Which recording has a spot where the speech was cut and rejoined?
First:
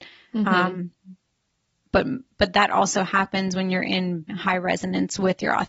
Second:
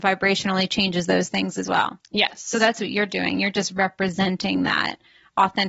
first; 1 cut; at 4.3 s

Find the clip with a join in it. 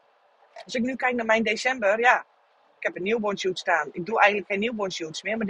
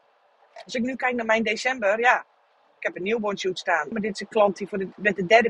second; 1 cut; at 3.9 s

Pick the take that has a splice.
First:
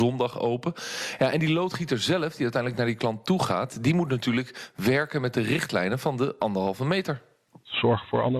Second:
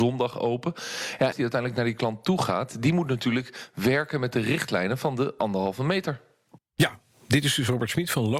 second; 2 cuts; at 1.3 s, 6.6 s

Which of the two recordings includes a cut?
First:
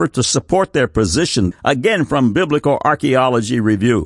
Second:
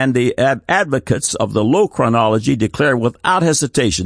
first; 1 cut; at 1.5 s

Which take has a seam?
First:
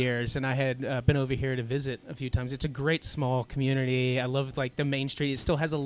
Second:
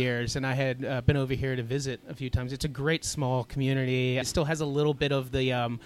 second; 1 cut; at 4.2 s

